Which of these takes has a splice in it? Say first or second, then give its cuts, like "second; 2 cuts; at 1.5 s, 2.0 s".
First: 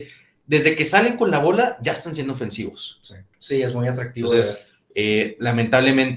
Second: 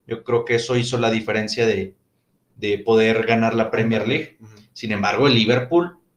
first; 1 cut; at 3.3 s